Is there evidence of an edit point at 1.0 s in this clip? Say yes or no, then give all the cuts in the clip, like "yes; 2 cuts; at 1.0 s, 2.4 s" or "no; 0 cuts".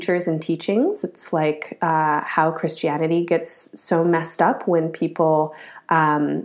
no; 0 cuts